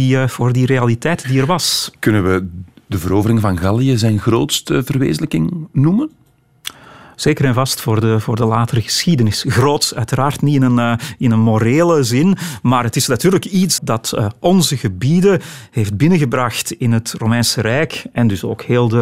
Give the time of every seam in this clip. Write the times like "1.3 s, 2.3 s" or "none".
1.9 s, 13.8 s